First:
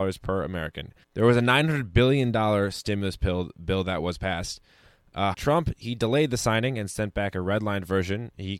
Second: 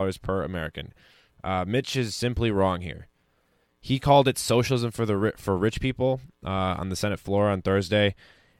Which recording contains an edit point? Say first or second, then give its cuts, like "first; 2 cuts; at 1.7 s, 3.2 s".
first; 2 cuts; at 1.0 s, 5.3 s